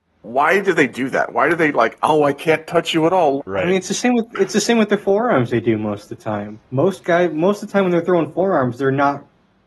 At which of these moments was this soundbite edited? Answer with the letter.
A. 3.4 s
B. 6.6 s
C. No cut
A